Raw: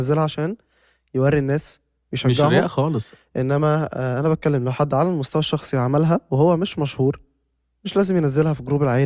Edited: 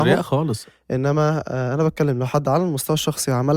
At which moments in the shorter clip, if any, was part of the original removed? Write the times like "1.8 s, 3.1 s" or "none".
none